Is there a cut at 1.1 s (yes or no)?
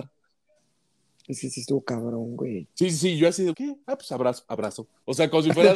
no